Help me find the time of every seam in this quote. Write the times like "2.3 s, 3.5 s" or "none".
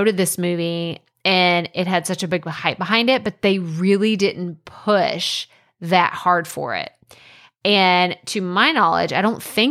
none